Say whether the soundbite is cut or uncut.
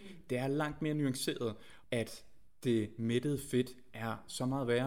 cut